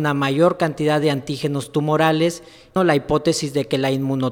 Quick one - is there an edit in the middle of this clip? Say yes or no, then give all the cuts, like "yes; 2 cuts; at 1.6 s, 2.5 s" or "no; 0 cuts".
yes; 1 cut; at 2.8 s